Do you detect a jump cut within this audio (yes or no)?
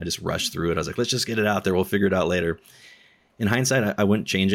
no